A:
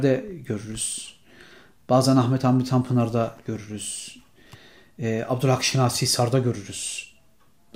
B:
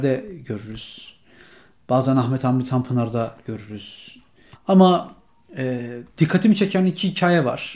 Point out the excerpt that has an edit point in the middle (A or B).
B